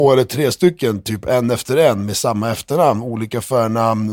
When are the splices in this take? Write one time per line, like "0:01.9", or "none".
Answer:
none

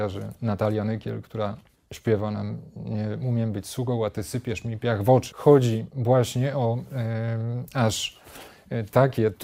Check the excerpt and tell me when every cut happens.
0:05.3

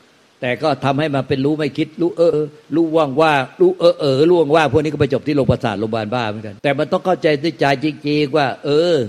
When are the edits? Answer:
0:02.3
0:06.6

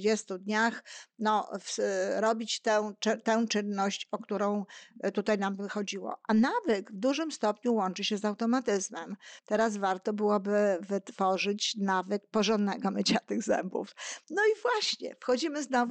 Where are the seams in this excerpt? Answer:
0:09.4

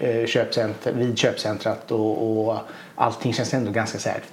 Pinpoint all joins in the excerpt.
none

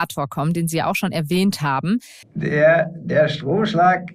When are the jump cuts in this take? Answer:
0:02.2

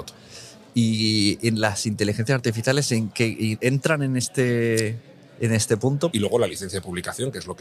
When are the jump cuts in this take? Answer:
0:06.1

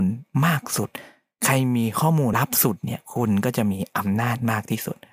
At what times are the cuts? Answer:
0:02.3

